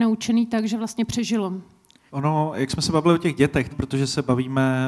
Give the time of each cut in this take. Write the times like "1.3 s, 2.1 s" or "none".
2.1 s, 3.7 s